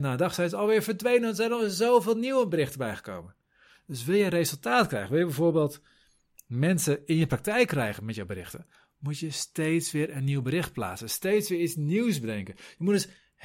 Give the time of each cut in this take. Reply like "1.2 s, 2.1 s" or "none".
none